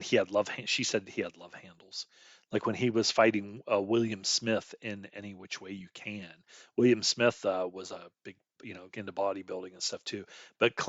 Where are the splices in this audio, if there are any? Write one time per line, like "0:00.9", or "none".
none